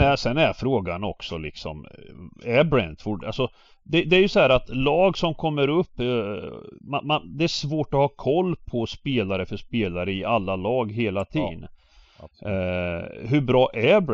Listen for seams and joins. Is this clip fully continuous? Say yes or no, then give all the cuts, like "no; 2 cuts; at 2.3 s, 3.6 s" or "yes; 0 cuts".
yes; 0 cuts